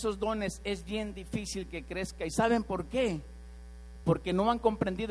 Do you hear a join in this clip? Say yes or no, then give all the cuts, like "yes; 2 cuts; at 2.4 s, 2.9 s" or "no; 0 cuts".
no; 0 cuts